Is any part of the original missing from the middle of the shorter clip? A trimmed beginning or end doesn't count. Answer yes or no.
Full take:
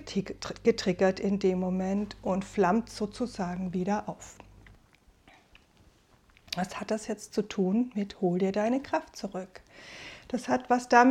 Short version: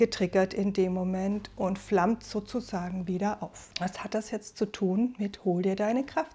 yes